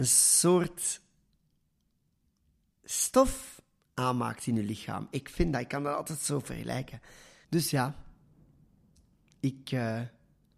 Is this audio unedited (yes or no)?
no